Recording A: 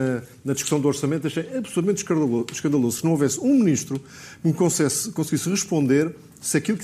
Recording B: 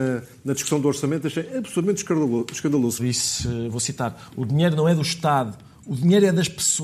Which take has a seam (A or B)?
B